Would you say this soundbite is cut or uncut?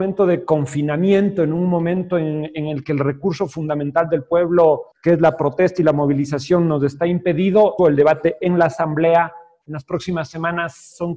cut